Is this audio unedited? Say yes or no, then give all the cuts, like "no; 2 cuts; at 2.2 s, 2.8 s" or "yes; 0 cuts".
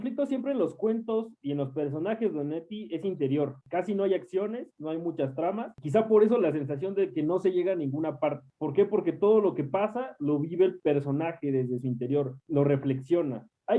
yes; 0 cuts